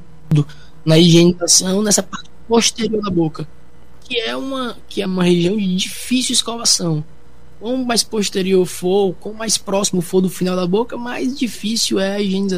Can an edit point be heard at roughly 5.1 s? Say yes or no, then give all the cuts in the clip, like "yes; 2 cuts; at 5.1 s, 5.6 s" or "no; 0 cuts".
yes; 1 cut; at 5.1 s